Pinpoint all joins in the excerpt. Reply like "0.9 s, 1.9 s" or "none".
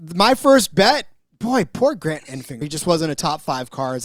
2.6 s